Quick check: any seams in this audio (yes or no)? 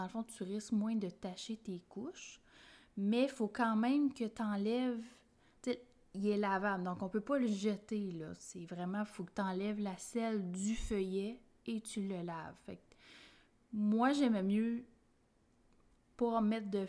no